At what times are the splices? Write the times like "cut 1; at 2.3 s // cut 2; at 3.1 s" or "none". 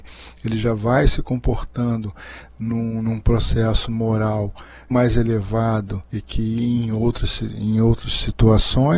cut 1; at 4.9 s // cut 2; at 6.1 s

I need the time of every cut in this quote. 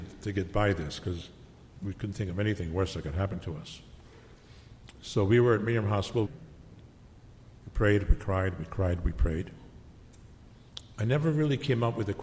cut 1; at 6.3 s // cut 2; at 10.9 s

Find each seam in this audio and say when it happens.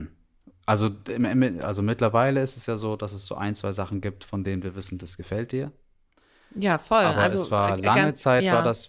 none

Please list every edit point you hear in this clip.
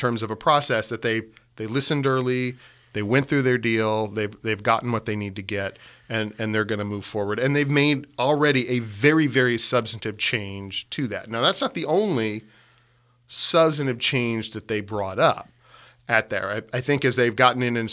none

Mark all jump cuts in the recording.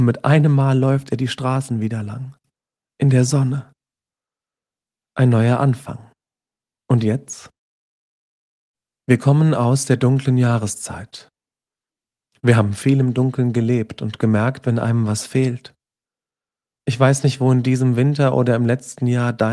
cut 1; at 14.6 s

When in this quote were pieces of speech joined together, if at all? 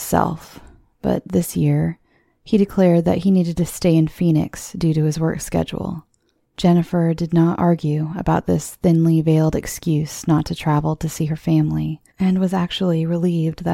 cut 1; at 6.4 s // cut 2; at 12.1 s

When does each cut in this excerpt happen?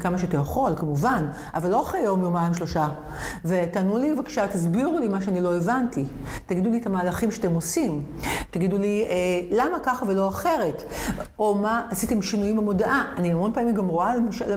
none

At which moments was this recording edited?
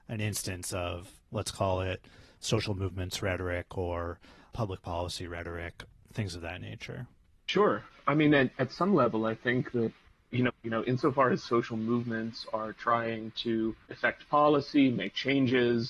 cut 1; at 10.5 s // cut 2; at 13.8 s

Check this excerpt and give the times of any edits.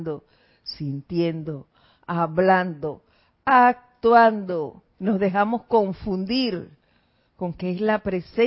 cut 1; at 4.9 s

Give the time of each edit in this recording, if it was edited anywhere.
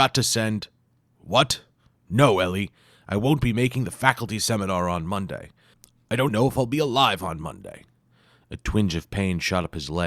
cut 1; at 6.3 s

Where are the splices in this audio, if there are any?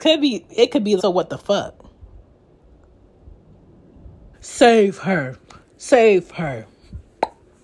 cut 1; at 1.0 s // cut 2; at 4.3 s

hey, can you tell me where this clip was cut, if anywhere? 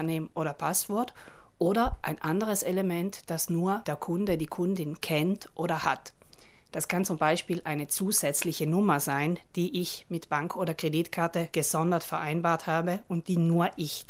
none

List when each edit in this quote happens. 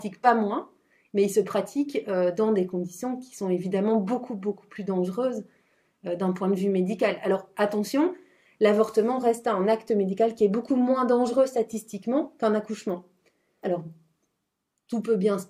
cut 1; at 13.6 s

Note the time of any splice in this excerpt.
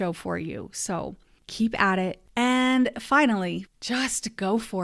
cut 1; at 2.3 s // cut 2; at 3.7 s

